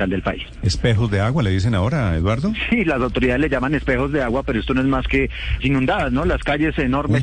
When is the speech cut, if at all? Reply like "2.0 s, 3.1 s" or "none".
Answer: 5.6 s